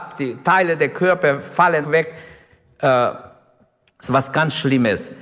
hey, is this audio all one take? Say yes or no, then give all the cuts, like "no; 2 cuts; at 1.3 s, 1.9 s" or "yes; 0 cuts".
no; 1 cut; at 1.8 s